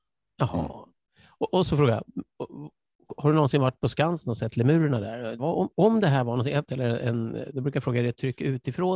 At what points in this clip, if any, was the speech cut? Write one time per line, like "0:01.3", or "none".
0:01.5
0:05.4
0:06.7